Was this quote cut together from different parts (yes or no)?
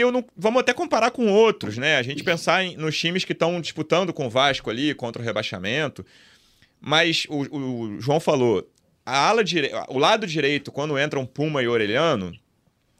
no